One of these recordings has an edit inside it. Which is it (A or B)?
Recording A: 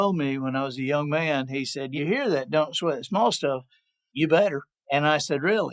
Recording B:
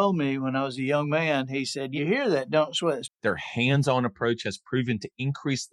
B